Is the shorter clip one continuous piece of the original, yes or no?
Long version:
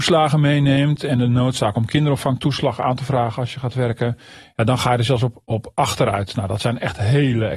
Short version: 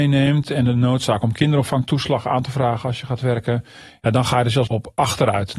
no